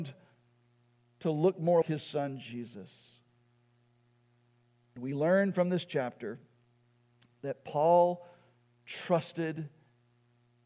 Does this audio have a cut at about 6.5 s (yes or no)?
no